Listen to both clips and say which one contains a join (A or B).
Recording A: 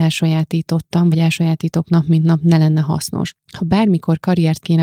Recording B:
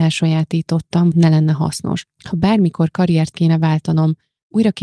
B